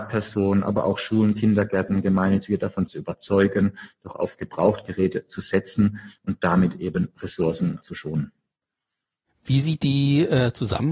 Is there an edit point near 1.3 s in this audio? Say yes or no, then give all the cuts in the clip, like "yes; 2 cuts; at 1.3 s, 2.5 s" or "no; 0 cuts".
no; 1 cut; at 7.8 s